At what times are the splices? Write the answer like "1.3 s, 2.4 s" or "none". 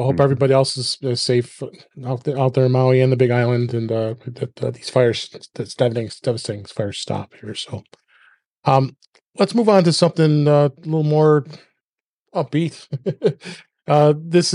none

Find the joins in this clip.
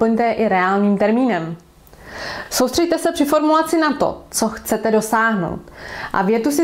none

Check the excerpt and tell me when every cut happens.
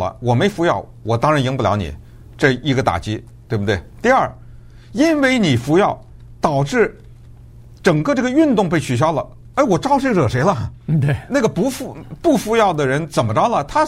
none

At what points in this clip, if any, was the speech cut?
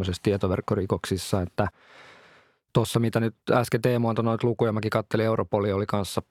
3.4 s

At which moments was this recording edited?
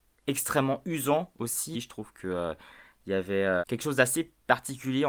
1.7 s, 3.6 s

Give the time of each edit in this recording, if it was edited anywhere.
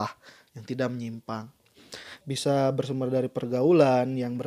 2.2 s

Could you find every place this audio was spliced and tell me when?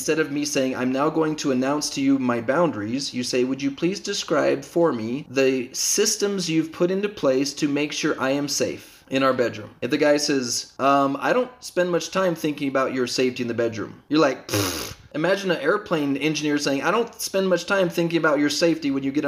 none

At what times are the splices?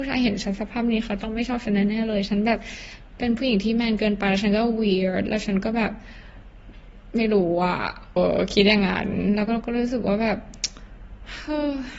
8.2 s

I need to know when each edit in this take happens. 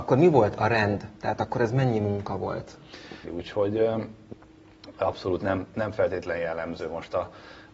3.2 s

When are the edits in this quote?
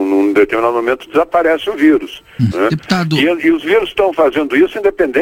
2.5 s

